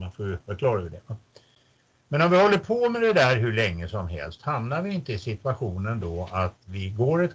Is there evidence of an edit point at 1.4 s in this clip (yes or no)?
no